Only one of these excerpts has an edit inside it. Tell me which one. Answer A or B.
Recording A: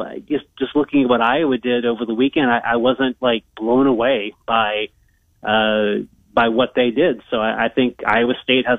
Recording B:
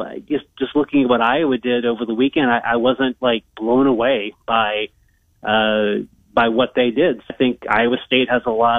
B